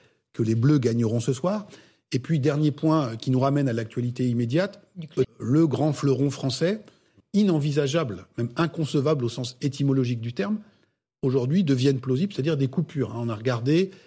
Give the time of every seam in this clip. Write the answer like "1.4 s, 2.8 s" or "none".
5.2 s, 7.2 s